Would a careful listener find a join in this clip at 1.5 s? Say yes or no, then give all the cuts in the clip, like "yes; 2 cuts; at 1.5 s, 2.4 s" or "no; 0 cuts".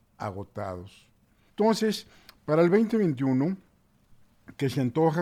yes; 1 cut; at 1.5 s